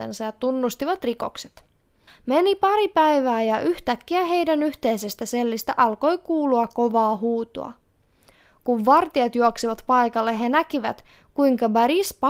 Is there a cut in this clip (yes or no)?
yes